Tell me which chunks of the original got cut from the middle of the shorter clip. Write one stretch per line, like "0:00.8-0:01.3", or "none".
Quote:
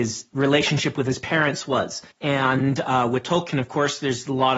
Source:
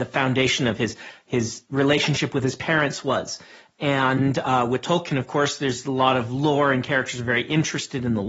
0:03.5-0:03.7